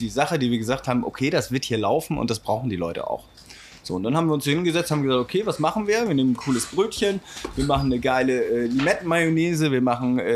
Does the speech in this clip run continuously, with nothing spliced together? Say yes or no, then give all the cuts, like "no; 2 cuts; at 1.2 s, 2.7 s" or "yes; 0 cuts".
yes; 0 cuts